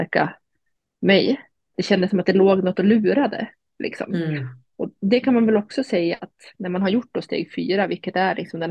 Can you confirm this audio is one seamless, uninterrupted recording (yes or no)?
no